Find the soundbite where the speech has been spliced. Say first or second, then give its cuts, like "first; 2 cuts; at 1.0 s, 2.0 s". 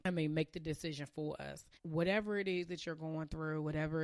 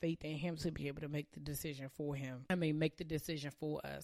first; 1 cut; at 1.8 s